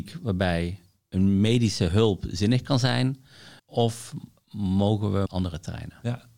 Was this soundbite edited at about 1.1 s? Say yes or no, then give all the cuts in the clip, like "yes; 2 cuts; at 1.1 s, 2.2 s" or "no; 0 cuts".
no; 2 cuts; at 3.6 s, 5.3 s